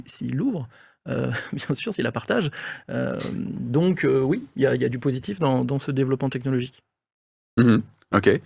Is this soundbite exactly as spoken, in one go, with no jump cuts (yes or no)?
yes